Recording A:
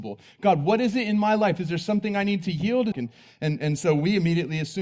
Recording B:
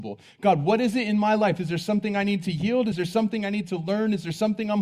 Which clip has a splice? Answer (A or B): A